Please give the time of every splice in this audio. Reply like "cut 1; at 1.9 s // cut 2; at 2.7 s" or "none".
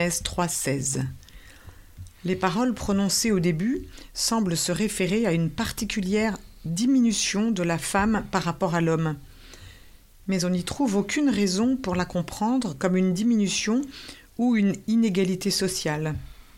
none